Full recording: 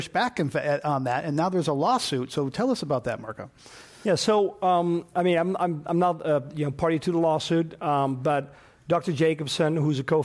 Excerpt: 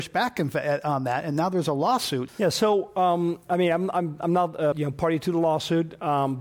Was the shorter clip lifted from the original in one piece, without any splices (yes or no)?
no